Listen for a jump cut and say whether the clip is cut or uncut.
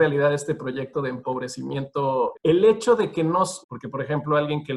cut